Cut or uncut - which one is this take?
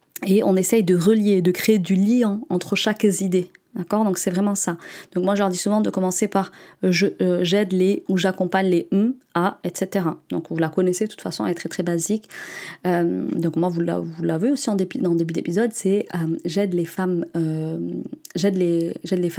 cut